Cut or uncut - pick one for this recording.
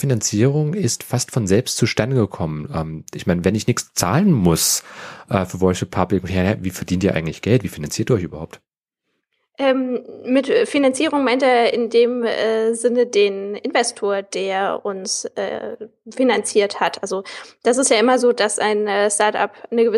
uncut